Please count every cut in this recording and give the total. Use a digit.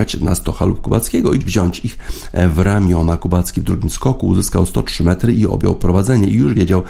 1